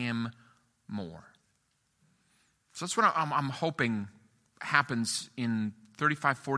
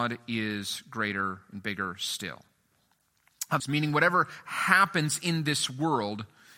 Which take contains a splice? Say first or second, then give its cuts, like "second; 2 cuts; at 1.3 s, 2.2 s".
second; 1 cut; at 3.6 s